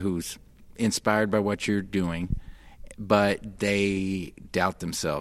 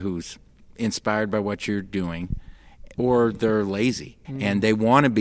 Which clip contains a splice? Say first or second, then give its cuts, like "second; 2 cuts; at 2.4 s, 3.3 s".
second; 2 cuts; at 2.9 s, 4.2 s